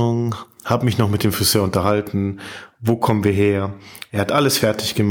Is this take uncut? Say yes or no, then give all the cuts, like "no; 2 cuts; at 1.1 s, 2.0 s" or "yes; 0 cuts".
no; 1 cut; at 4.1 s